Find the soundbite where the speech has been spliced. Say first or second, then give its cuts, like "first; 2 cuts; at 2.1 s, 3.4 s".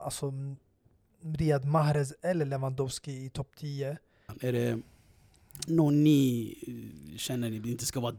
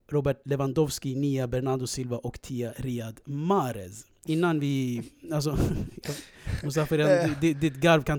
first; 1 cut; at 4.3 s